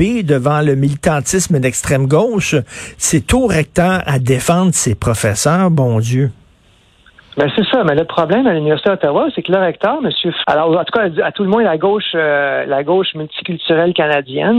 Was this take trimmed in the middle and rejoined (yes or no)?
yes